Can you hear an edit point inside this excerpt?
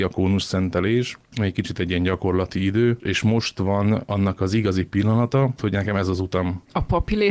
yes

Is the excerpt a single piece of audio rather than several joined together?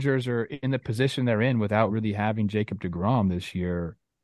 yes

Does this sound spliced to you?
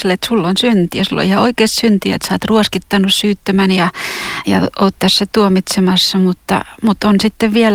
yes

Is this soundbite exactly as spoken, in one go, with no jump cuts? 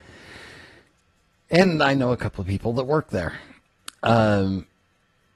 yes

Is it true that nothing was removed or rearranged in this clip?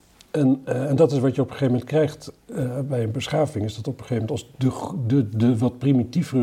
yes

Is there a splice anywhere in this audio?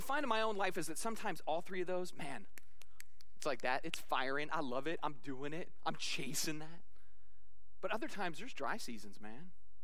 no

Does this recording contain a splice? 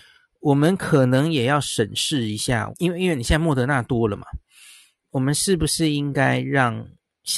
yes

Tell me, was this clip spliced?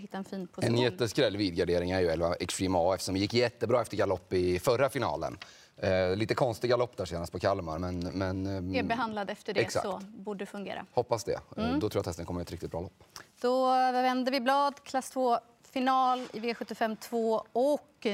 no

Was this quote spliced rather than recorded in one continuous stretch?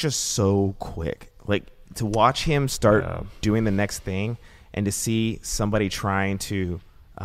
no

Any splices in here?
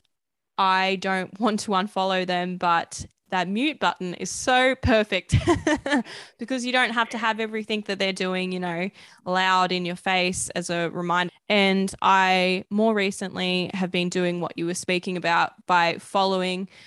yes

